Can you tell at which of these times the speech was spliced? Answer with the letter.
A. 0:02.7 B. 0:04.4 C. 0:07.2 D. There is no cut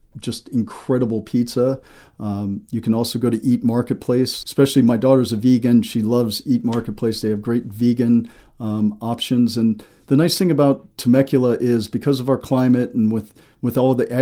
B